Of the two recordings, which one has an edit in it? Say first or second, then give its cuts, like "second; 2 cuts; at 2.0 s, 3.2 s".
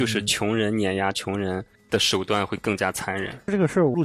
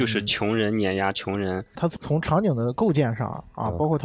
second; 1 cut; at 1.8 s